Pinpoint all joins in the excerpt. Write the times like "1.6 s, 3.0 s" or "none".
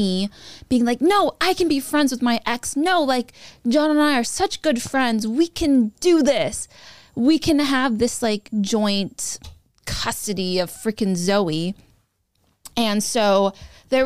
none

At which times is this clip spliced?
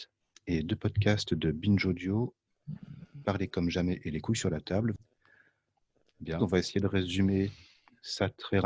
6.4 s

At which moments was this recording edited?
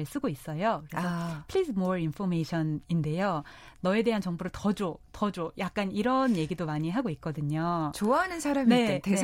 none

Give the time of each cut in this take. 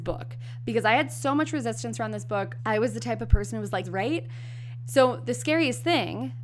2.6 s, 3.8 s, 4.9 s

